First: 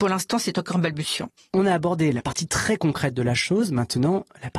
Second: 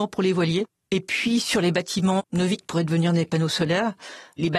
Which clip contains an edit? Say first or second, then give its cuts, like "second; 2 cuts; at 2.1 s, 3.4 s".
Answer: first; 1 cut; at 1.4 s